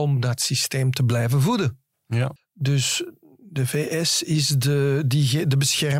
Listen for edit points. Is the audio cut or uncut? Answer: cut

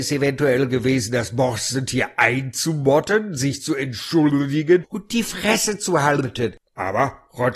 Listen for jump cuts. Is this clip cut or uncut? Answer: uncut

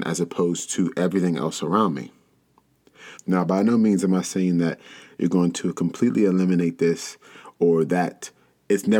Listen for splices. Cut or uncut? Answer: cut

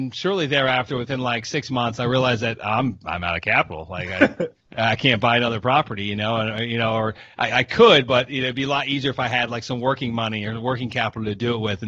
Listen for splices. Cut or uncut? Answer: cut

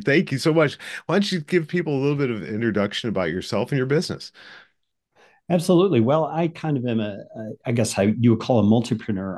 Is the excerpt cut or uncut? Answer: uncut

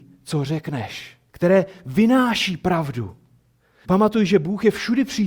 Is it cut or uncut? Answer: cut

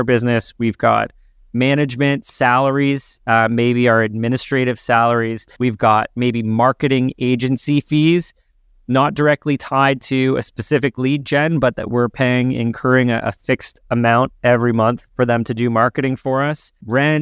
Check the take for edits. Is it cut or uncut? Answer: uncut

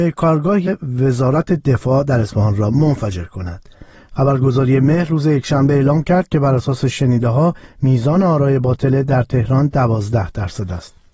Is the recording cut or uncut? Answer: cut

